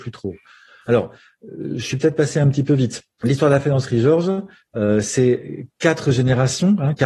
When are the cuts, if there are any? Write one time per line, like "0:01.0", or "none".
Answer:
none